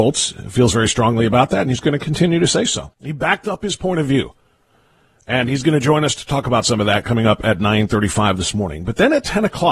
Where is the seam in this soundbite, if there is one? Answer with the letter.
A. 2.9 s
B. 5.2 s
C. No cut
A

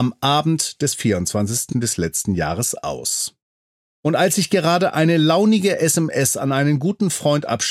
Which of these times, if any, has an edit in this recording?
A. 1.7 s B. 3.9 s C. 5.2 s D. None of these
A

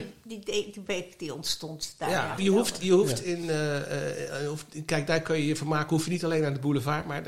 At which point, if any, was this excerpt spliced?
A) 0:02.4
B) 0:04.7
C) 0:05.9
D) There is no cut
A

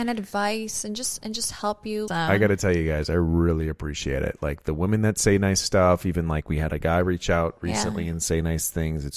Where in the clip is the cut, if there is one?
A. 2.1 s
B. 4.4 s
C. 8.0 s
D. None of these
A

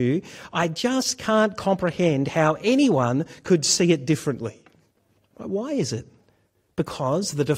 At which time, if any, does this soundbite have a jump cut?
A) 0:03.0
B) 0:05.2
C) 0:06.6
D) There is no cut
B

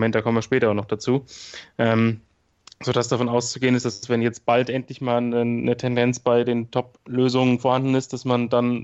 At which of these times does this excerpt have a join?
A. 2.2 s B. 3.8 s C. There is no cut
C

